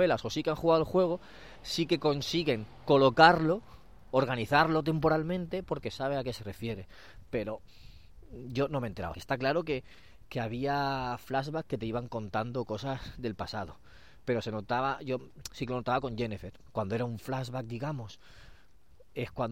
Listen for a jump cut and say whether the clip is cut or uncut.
cut